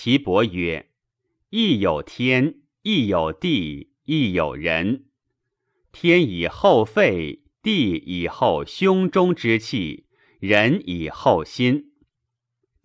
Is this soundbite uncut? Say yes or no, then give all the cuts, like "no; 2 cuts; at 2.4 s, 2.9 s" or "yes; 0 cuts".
yes; 0 cuts